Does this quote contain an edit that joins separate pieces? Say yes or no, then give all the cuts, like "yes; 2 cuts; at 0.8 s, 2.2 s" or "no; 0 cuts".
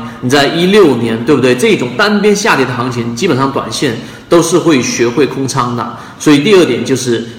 no; 0 cuts